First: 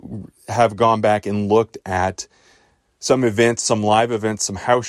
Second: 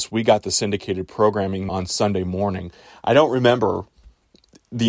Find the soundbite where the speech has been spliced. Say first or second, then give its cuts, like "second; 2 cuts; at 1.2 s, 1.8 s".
second; 1 cut; at 1.7 s